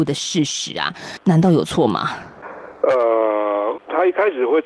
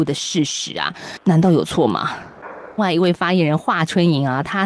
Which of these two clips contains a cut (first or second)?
second